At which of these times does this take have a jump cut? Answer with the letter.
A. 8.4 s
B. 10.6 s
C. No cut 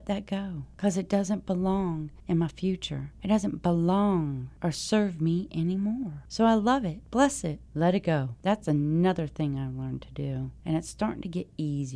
C